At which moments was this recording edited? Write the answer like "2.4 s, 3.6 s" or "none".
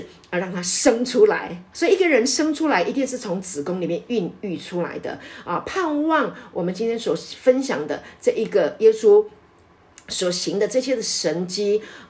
1.7 s